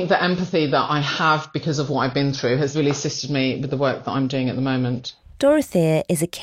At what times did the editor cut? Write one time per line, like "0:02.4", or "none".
none